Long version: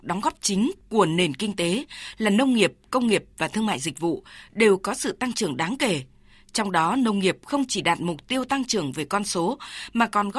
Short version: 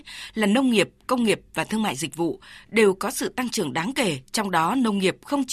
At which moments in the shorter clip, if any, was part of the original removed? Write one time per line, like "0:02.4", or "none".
0:04.2